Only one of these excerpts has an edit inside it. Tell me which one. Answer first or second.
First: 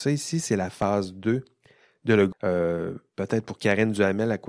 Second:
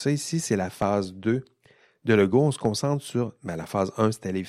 first